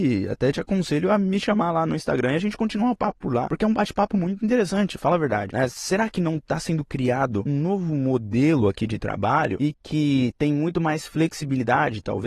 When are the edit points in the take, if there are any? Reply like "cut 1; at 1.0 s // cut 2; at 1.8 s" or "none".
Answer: none